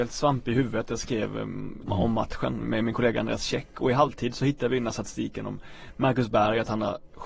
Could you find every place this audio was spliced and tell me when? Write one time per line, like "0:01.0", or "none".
0:01.9